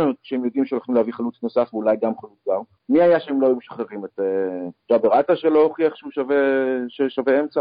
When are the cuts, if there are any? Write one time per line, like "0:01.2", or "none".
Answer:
0:02.8
0:04.8